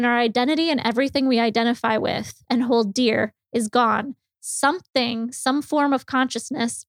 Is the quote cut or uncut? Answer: uncut